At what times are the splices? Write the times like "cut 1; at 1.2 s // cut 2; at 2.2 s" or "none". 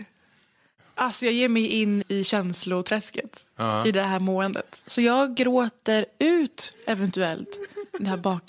cut 1; at 2.0 s